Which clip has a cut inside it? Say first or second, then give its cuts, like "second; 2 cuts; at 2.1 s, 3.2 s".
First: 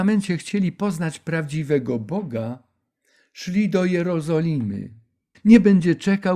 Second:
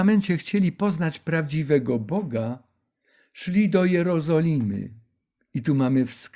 first; 1 cut; at 5.3 s